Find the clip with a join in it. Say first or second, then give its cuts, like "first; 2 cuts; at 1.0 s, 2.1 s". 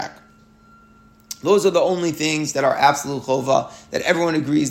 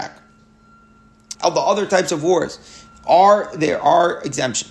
second; 1 cut; at 1.3 s